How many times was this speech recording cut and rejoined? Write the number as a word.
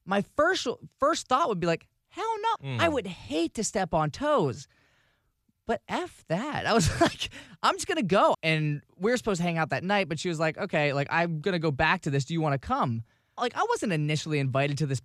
three